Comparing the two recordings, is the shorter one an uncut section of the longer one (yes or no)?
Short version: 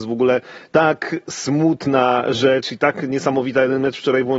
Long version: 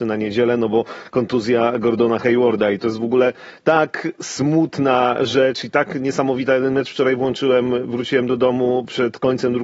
yes